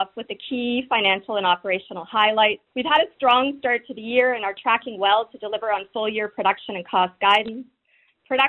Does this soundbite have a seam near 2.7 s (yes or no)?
yes